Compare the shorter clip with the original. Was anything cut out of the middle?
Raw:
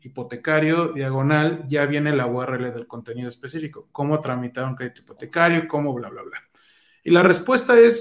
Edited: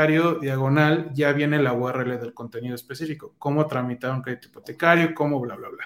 no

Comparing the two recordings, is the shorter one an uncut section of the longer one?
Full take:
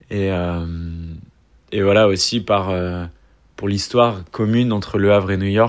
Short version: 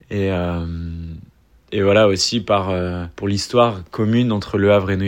no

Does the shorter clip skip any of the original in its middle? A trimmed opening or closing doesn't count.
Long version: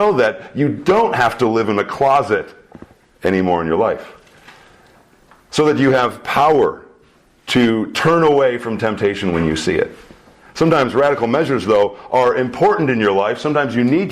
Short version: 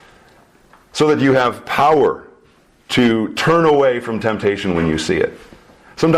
no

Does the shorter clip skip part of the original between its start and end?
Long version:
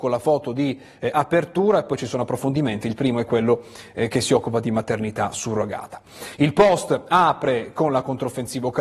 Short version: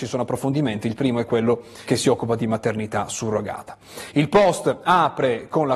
yes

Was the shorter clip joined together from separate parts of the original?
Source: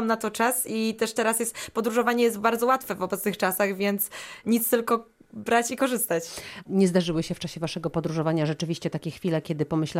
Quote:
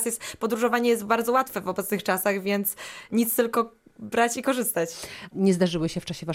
no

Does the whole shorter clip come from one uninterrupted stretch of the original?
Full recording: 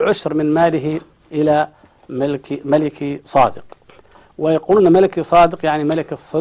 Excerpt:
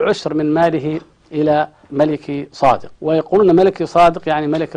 no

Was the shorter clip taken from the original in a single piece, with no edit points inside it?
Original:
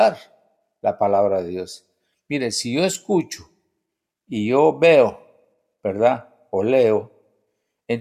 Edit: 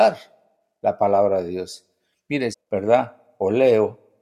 no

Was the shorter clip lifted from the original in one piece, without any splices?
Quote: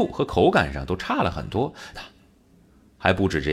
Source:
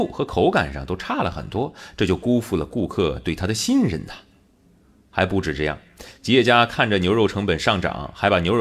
no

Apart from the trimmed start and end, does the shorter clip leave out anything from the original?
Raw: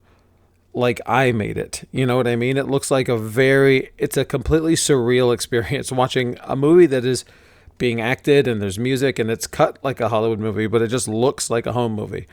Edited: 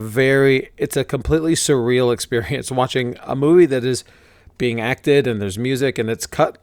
no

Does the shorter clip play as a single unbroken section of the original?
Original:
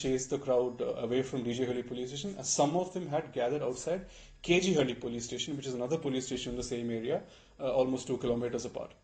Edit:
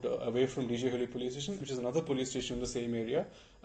no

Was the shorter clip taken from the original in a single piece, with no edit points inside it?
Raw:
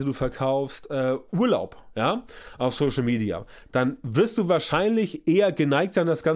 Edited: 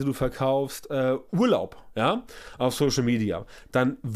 yes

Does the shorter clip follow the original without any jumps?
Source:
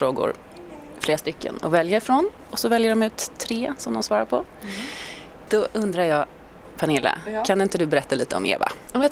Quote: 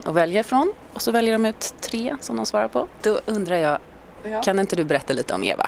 no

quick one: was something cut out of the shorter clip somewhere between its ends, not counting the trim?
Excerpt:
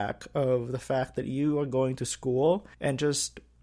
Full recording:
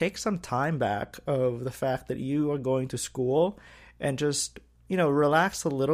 yes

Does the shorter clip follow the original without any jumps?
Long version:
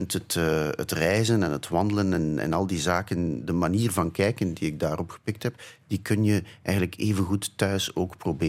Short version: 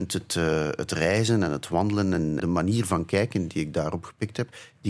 no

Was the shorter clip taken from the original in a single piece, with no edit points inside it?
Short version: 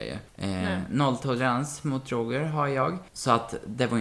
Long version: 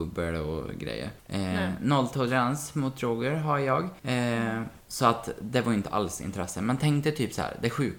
no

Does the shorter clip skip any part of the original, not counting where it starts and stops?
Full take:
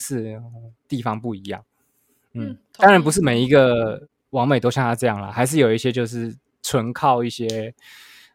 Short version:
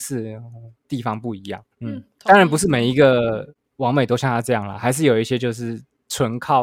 yes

